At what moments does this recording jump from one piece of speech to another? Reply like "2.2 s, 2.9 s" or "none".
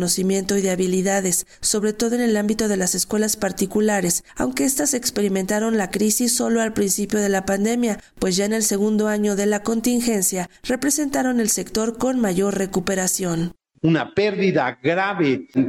none